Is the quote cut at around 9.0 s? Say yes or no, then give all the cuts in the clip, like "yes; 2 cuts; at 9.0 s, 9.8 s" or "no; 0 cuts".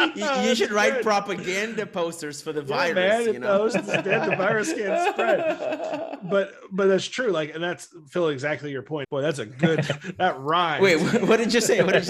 yes; 1 cut; at 9.0 s